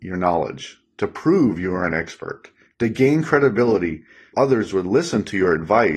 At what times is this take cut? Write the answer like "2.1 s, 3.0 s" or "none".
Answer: 2.7 s, 4.3 s

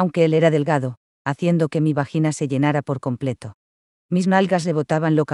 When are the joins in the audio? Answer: 1.1 s, 3.9 s

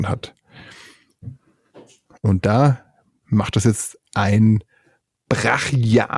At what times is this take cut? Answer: none

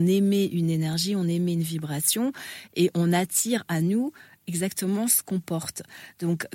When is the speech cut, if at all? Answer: none

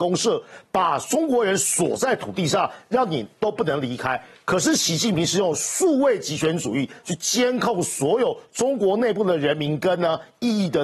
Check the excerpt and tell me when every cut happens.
none

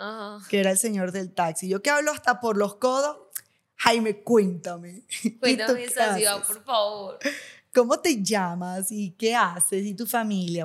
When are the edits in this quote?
none

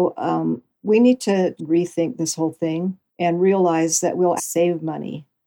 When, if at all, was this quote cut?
1.6 s, 3.1 s, 4.4 s

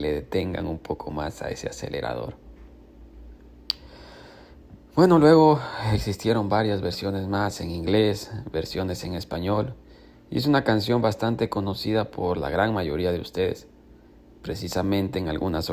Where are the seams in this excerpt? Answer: none

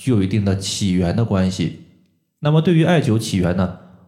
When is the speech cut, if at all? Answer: none

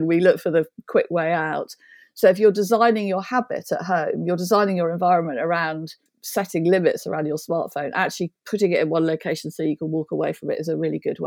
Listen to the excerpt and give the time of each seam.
none

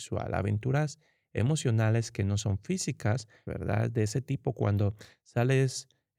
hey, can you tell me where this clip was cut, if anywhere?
3.5 s

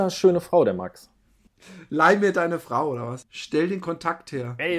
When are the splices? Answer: none

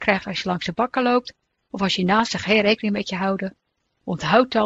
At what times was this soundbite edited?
none

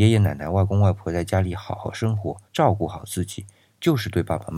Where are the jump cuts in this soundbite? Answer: 2.5 s

